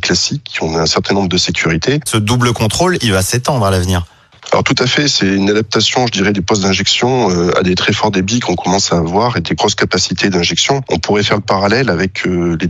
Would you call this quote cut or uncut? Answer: cut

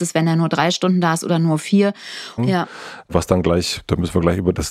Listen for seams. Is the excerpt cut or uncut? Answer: cut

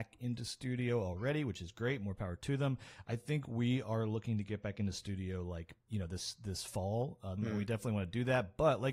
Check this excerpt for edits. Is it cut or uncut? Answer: cut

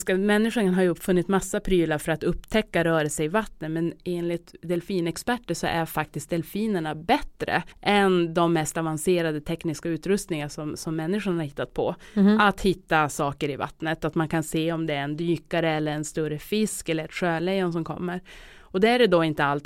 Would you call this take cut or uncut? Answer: cut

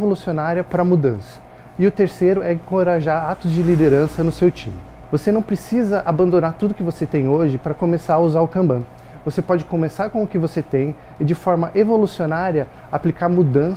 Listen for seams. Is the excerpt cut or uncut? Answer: uncut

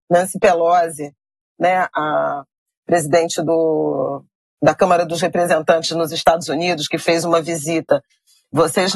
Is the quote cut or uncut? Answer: uncut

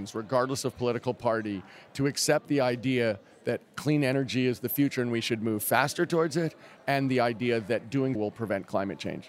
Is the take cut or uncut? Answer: cut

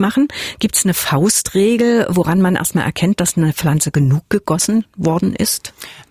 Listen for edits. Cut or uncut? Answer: uncut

